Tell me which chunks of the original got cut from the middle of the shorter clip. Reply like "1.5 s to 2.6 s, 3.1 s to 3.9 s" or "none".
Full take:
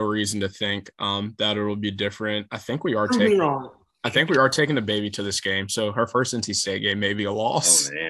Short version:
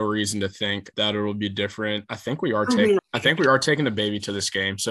0.9 s to 1.4 s, 3.4 s to 3.9 s